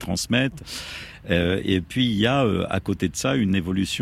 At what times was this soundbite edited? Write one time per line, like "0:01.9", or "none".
none